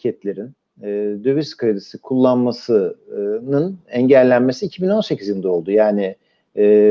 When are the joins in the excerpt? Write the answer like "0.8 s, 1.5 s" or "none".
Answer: none